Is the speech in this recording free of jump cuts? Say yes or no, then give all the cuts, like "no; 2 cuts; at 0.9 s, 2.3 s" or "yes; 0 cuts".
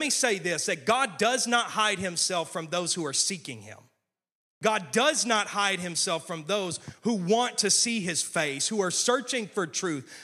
yes; 0 cuts